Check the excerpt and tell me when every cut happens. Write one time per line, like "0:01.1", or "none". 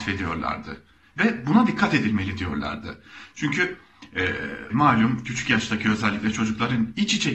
0:04.7